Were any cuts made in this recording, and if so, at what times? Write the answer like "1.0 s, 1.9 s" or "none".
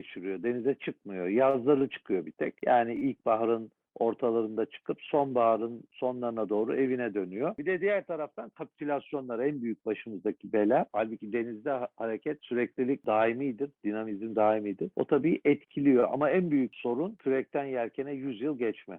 7.6 s, 10.9 s